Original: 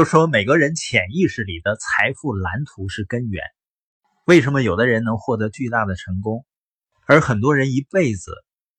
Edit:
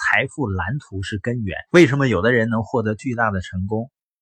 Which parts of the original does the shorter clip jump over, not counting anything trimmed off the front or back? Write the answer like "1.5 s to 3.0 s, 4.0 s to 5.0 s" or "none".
3.5 s to 4.2 s